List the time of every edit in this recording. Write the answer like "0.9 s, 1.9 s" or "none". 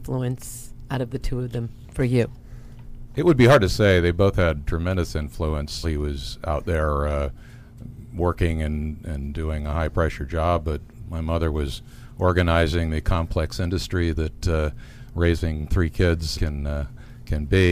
5.8 s, 16.3 s